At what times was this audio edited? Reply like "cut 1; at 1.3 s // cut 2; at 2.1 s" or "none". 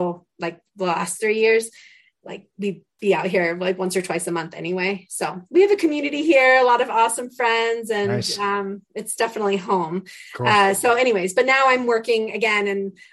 none